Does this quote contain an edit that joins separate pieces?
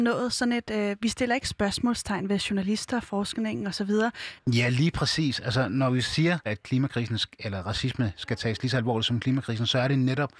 yes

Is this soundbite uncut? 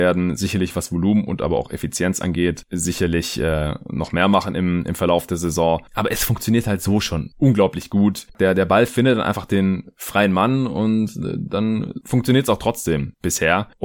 yes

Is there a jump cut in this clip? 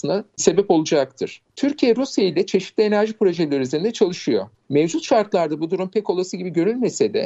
yes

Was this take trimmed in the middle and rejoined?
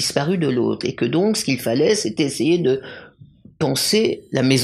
no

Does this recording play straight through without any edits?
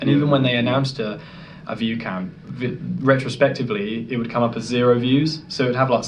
yes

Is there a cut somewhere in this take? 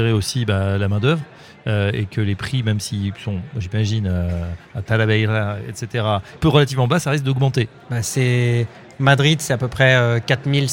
yes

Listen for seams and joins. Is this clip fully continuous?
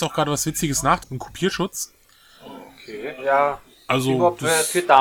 no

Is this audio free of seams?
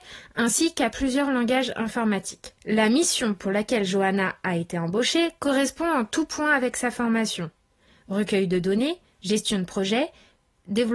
no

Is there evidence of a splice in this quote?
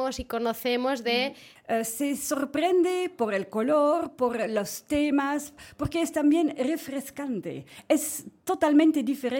yes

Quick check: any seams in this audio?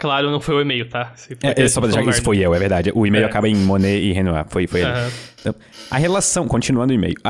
no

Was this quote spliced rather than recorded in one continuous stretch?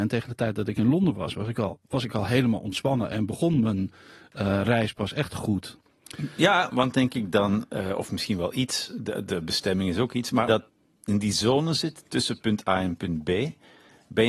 yes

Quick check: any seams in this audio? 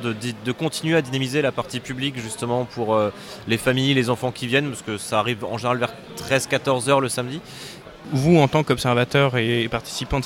yes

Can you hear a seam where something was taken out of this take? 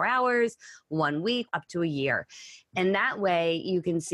yes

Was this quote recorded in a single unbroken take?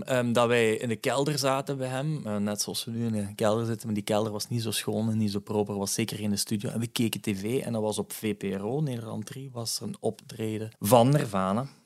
no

